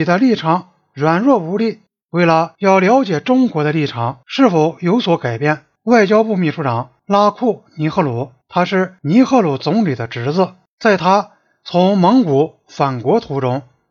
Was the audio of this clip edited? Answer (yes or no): no